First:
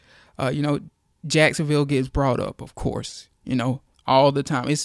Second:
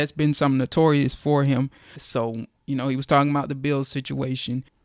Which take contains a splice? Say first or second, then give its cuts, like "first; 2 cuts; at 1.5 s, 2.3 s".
second; 1 cut; at 2.0 s